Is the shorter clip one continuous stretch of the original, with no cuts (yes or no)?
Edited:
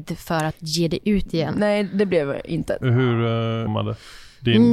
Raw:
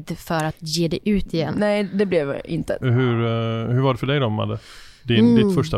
no